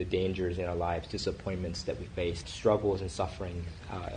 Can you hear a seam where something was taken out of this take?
yes; 1 cut; at 2.4 s

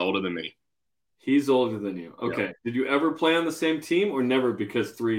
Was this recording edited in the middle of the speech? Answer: no; 0 cuts

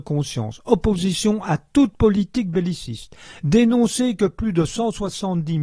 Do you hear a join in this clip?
no; 0 cuts

